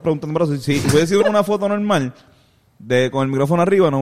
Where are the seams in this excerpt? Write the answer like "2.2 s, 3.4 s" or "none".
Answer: 1.2 s

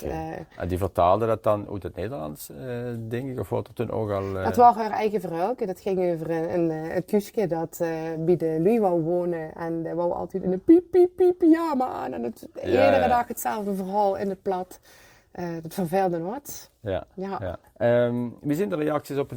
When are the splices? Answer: none

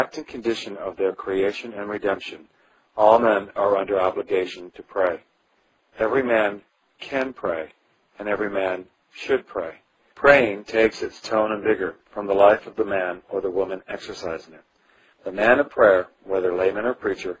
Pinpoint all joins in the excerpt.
10.1 s, 15.1 s

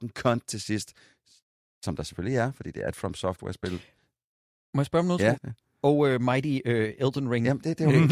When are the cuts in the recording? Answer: 5.4 s

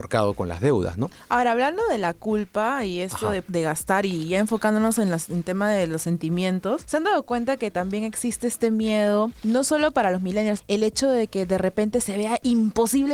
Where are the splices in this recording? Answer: 10.6 s

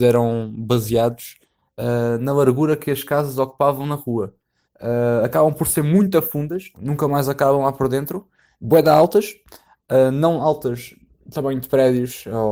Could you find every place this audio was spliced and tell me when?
4.6 s, 6.7 s

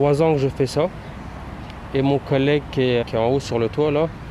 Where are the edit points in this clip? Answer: 3.0 s

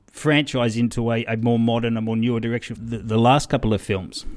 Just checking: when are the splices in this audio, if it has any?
2.8 s

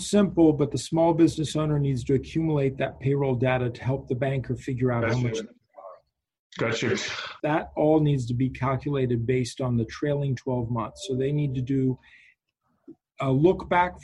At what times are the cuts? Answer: 7.4 s

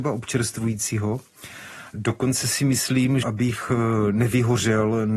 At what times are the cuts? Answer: 1.9 s, 3.2 s

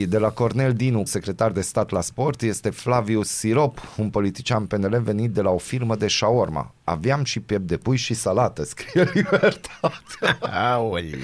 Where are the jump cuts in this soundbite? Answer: 1.1 s

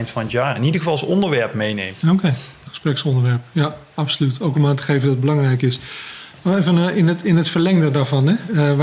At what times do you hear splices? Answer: none

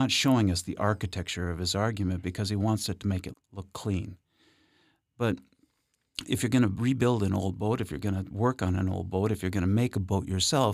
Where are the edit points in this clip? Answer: 3.3 s

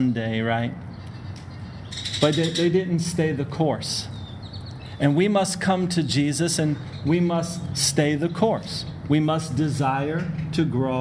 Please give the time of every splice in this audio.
none

